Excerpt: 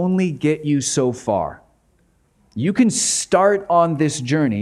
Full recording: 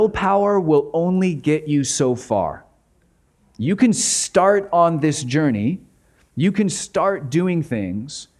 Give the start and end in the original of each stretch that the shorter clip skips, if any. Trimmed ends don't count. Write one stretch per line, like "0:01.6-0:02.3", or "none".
none